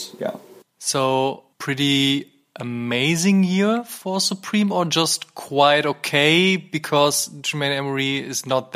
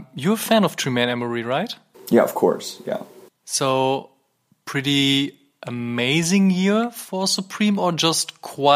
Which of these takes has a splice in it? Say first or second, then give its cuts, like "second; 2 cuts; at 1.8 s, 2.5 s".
first; 1 cut; at 1.5 s